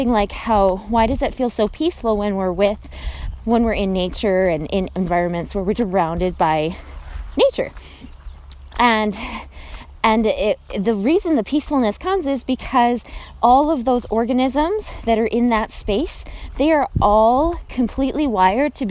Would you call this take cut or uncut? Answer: cut